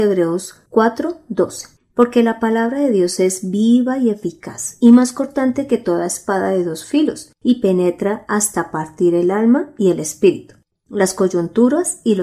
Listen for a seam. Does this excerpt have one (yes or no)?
no